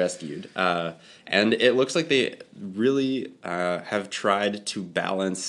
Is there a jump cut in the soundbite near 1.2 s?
no; 0 cuts

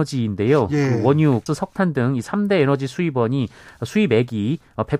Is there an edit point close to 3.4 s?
no; 1 cut; at 1.5 s

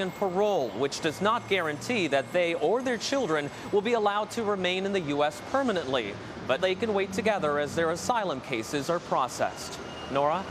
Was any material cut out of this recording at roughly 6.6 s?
yes; 1 cut; at 6.6 s

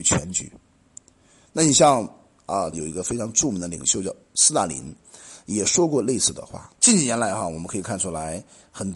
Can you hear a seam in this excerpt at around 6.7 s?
yes; 2 cuts; at 2.7 s, 6.7 s

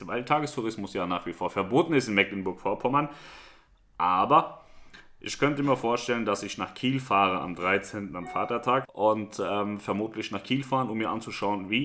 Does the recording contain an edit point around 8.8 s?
yes; 1 cut; at 8.8 s

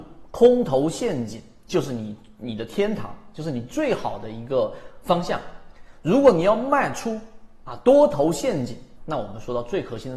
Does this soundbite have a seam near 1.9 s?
no; 1 cut; at 9.0 s

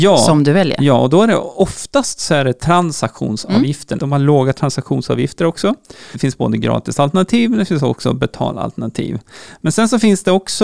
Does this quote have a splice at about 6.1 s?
yes; 2 cuts; at 4.0 s, 6.1 s

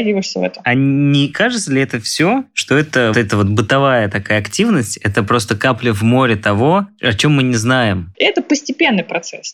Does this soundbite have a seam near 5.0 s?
no; 2 cuts; at 3.1 s, 8.1 s

